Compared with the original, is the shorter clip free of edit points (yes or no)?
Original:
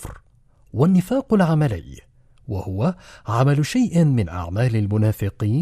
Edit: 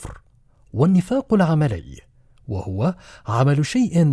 yes